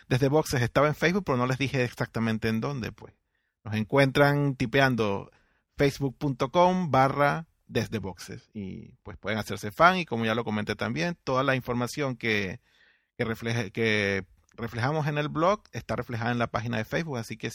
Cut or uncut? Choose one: uncut